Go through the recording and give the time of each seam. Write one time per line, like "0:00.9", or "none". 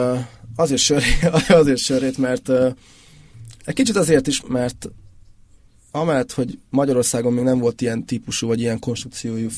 0:04.4
0:06.7